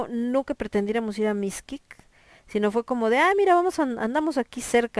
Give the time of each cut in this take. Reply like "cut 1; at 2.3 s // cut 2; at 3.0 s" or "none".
none

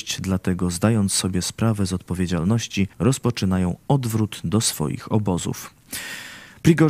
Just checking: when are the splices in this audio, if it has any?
cut 1; at 2.9 s

